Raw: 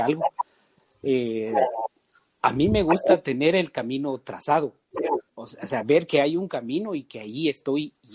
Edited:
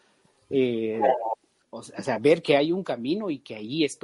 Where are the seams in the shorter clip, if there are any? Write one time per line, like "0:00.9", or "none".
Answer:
0:01.6